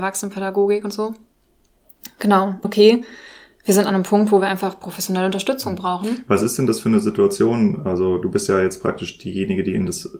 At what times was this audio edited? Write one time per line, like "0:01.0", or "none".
0:02.6